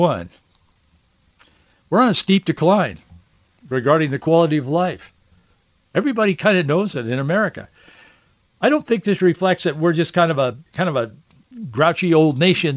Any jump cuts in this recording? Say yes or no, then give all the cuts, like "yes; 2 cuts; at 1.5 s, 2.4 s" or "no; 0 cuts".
yes; 2 cuts; at 8.5 s, 10.7 s